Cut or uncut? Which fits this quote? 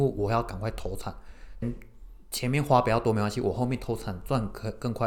cut